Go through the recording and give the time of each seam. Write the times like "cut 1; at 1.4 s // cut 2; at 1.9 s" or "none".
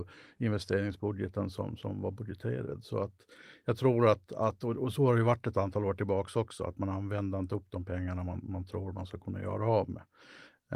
none